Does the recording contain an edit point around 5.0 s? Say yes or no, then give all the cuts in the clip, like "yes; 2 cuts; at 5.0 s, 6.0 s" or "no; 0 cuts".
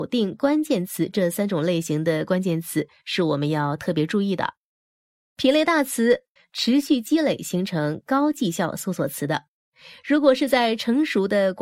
no; 1 cut; at 6.4 s